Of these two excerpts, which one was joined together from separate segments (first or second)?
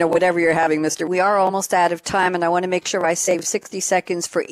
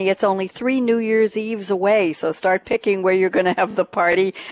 first